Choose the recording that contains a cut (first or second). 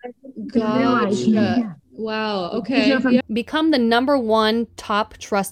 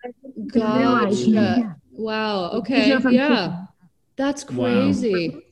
first